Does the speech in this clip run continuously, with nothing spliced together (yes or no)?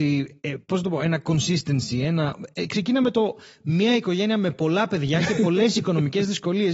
yes